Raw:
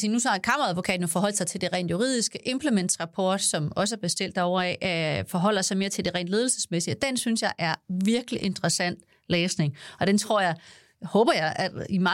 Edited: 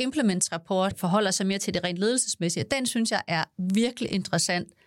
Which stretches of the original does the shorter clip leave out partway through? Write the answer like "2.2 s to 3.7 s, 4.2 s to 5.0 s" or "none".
3.4 s to 5.2 s